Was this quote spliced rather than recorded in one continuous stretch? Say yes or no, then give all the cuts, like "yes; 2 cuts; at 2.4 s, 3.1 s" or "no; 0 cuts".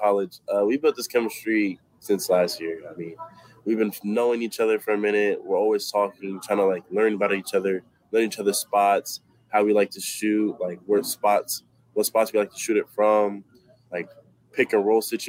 no; 0 cuts